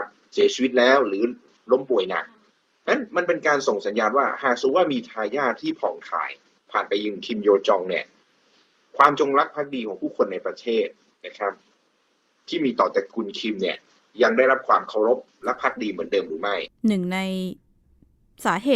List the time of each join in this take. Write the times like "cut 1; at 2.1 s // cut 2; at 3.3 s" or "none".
cut 1; at 16.8 s